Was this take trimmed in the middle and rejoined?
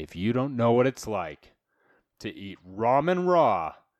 no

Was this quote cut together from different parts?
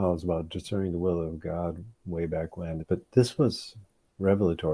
yes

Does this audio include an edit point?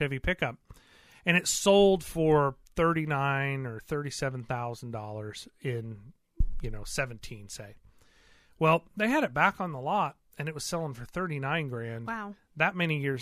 no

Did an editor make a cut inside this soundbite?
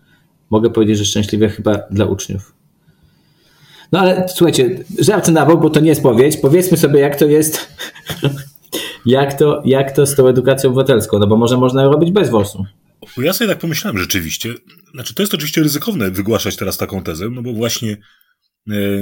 no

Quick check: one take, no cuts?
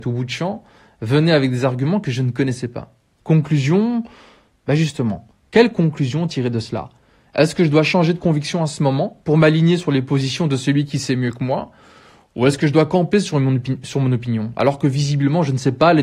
no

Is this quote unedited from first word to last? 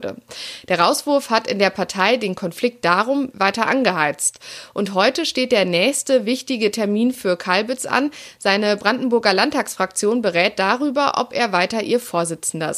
no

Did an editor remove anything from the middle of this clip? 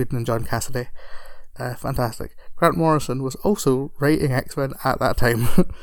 yes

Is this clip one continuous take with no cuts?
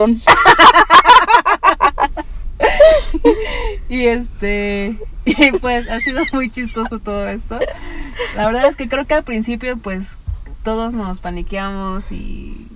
yes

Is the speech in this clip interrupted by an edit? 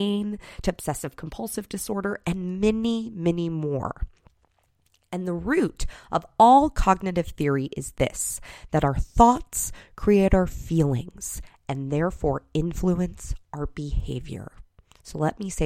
no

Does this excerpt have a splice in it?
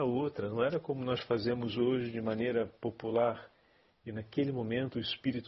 yes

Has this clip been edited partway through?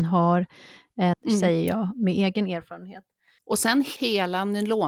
yes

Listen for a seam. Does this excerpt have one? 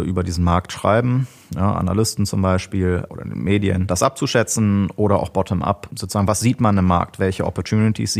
no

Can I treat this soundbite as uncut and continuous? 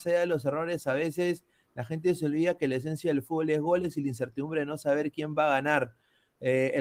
yes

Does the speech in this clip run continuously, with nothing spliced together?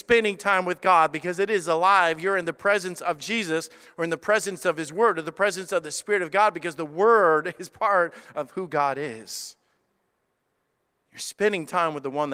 yes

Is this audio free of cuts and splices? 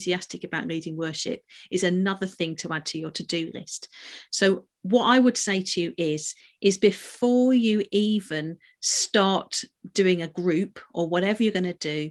yes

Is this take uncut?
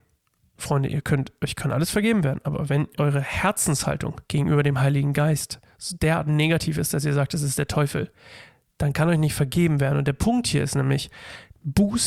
no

